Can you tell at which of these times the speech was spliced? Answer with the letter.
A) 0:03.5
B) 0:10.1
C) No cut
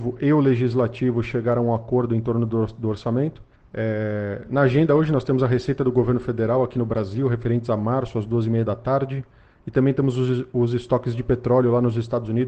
A